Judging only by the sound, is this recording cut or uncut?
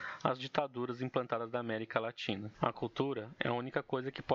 cut